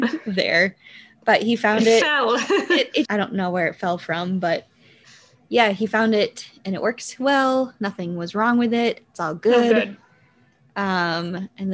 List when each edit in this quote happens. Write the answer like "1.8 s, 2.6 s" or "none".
3.0 s